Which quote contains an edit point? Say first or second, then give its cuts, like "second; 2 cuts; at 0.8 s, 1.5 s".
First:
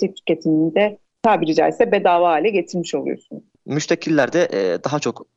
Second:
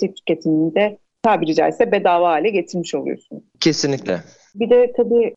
first; 1 cut; at 3.6 s